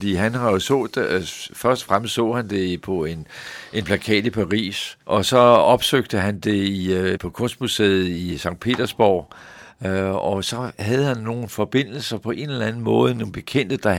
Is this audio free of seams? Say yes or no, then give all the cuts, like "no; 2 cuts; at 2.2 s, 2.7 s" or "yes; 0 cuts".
no; 2 cuts; at 5.0 s, 7.2 s